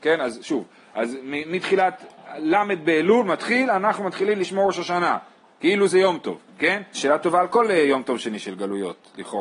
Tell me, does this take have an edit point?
yes; 1 cut; at 6.9 s

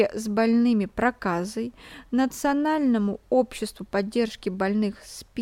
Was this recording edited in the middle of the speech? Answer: no; 0 cuts

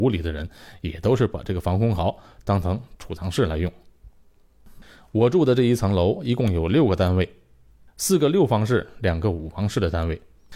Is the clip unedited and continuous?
yes; 0 cuts

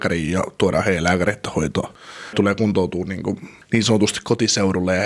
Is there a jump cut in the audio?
no; 0 cuts

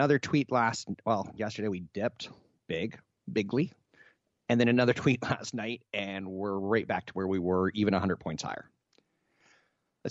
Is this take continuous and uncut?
yes; 0 cuts

